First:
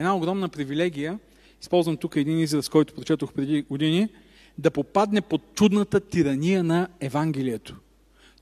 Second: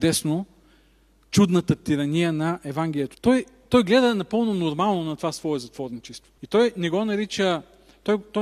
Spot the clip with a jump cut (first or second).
second